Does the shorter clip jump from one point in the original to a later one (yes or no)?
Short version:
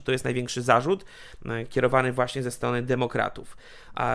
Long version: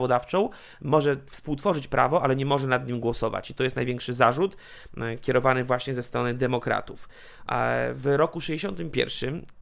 no